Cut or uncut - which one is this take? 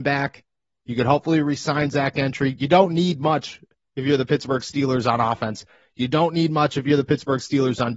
uncut